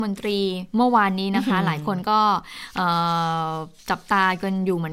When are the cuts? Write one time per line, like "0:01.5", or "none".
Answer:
0:03.8